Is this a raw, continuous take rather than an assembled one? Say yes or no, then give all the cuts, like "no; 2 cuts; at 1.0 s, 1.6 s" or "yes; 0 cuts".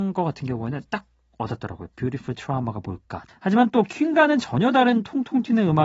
no; 1 cut; at 3.3 s